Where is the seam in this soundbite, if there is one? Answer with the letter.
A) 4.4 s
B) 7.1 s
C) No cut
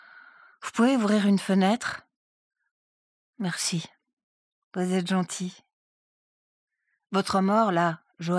C